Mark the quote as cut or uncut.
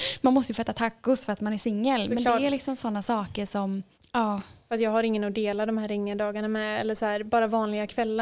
cut